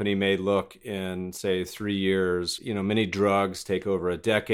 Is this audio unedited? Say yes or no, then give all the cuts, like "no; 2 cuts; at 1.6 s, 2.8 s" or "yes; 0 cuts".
no; 1 cut; at 2.6 s